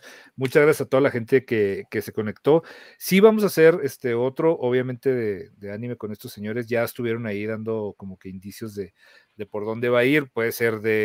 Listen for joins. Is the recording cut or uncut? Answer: uncut